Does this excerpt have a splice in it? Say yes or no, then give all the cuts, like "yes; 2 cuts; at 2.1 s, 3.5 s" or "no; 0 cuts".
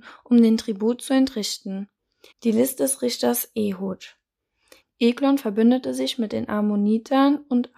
yes; 2 cuts; at 2.3 s, 4.8 s